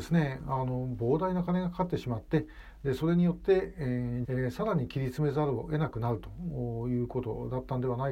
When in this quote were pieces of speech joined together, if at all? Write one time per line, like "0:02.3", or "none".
0:04.2